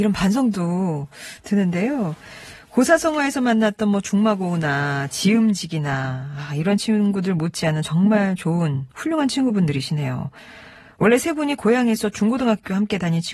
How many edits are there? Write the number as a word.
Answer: one